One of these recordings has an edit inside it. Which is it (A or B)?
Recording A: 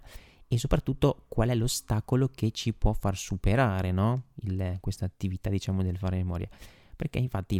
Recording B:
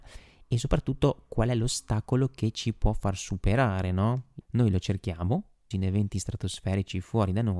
B